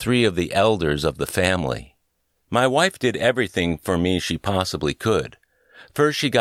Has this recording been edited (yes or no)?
no